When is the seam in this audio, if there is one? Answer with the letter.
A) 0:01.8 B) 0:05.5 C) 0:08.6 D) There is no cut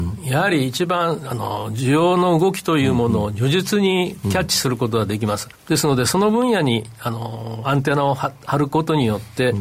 B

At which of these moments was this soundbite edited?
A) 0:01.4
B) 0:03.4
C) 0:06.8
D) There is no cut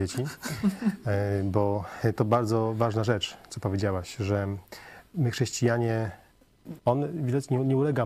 C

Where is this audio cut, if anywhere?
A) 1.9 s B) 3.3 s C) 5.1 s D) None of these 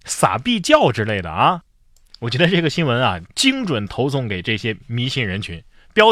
B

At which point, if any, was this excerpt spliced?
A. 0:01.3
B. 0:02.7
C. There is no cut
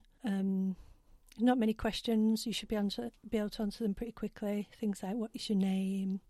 C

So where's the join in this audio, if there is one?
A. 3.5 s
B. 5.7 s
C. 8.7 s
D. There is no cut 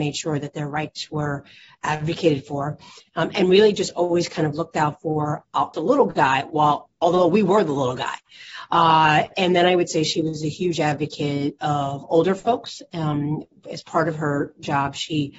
B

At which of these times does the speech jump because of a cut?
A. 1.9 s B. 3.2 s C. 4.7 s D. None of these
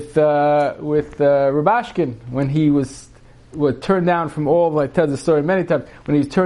D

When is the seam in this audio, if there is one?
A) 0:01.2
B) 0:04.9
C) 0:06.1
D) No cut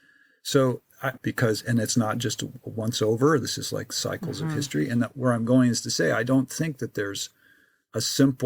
A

